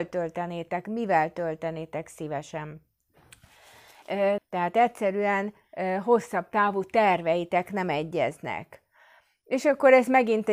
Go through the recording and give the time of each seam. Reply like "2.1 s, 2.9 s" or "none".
4.4 s